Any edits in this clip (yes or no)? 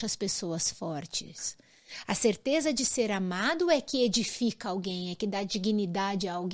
no